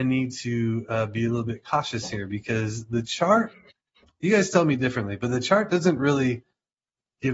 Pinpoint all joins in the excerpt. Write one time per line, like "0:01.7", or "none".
none